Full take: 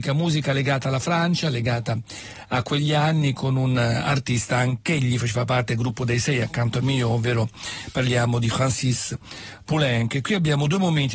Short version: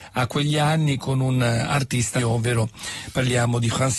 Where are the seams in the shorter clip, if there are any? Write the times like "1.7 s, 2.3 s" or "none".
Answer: 2.2 s